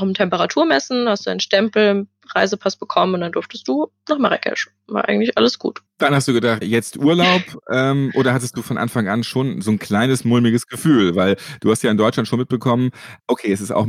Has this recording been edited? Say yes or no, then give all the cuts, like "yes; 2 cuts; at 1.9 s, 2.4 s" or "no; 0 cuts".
yes; 1 cut; at 6.6 s